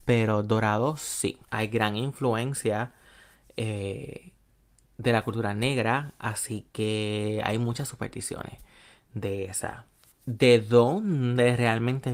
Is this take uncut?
no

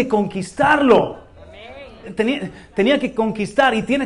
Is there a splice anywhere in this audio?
yes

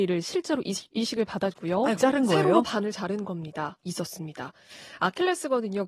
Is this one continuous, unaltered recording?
no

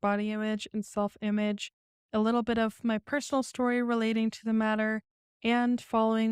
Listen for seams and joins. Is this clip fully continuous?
yes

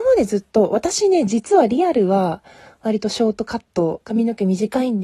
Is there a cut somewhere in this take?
no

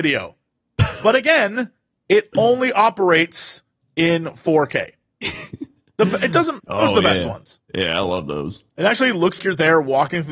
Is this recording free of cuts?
no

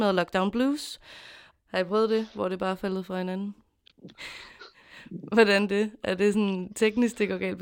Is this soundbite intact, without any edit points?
no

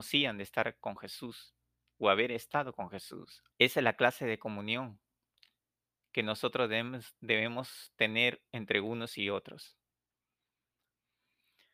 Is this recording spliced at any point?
yes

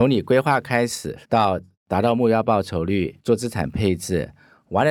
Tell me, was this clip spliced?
yes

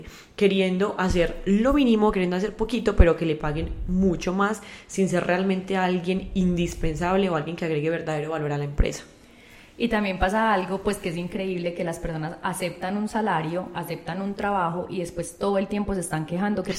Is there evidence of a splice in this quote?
no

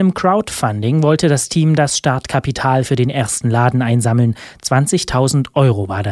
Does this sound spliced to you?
no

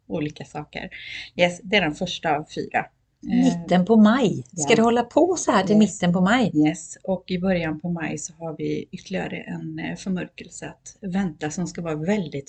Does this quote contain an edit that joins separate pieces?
no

